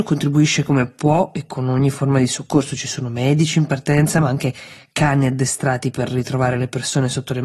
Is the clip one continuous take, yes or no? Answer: yes